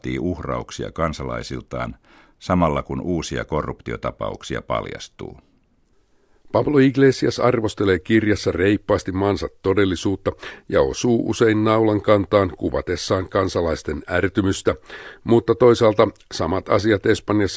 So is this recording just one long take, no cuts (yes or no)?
yes